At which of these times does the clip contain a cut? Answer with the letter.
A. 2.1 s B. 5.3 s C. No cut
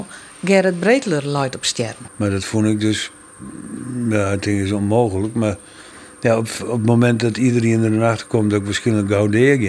A